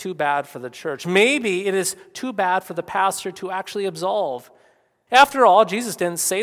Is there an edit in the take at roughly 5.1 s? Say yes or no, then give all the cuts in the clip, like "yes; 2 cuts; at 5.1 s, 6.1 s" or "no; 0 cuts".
yes; 1 cut; at 5.1 s